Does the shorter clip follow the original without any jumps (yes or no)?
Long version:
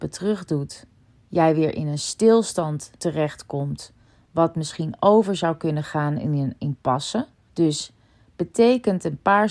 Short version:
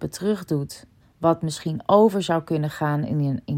no